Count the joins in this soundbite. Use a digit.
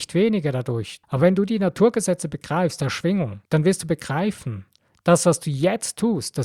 2